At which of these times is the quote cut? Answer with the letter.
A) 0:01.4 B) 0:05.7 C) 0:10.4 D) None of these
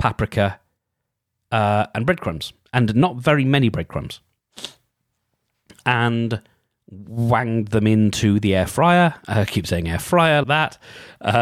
C